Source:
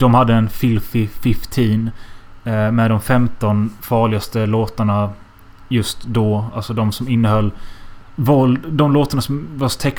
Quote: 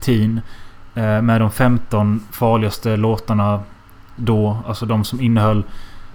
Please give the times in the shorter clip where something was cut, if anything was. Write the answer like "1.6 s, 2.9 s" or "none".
4.2 s